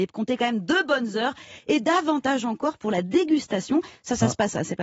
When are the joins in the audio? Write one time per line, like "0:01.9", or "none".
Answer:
none